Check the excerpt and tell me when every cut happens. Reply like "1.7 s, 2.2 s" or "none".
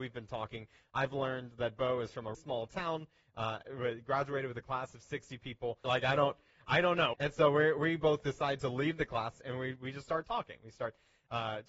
2.3 s, 5.8 s, 7.1 s